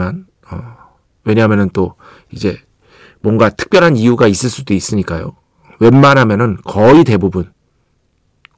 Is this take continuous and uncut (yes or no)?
yes